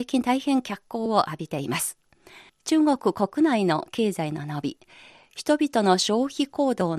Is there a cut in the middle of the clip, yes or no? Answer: yes